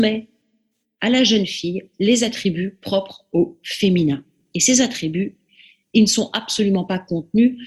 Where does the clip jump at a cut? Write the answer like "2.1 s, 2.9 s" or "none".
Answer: none